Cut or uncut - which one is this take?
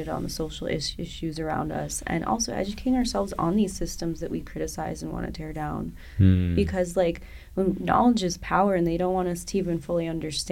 uncut